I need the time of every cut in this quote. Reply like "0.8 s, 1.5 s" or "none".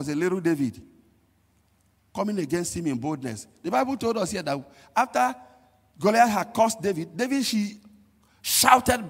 none